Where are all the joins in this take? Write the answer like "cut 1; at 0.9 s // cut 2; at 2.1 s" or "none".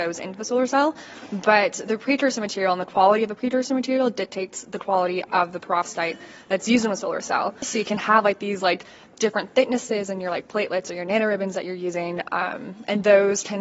cut 1; at 7.6 s